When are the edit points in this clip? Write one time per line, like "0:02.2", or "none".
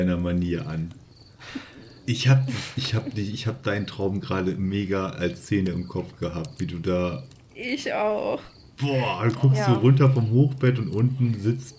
0:01.4